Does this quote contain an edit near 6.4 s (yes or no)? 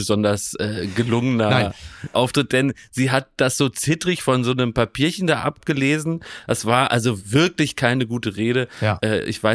no